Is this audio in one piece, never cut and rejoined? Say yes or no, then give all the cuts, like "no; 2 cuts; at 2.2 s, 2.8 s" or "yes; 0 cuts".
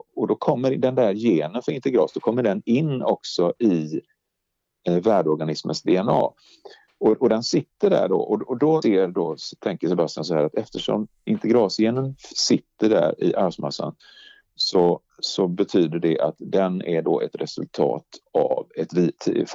no; 1 cut; at 8.8 s